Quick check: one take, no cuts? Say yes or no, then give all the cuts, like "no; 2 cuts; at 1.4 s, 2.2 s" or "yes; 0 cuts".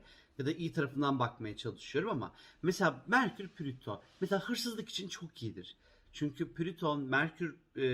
no; 1 cut; at 6.0 s